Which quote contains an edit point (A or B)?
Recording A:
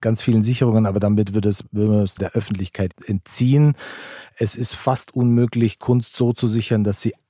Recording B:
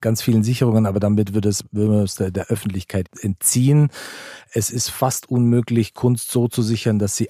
A